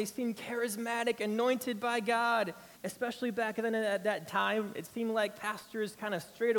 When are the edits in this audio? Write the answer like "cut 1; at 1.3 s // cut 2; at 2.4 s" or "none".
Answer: cut 1; at 2.7 s